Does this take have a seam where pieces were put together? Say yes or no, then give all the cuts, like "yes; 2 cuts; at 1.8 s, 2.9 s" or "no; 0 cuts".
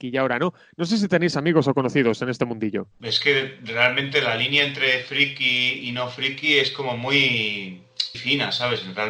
yes; 1 cut; at 8.1 s